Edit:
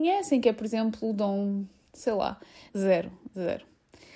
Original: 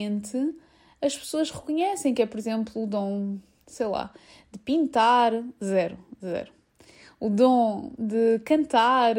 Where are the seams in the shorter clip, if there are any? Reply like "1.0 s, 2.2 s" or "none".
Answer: 2.7 s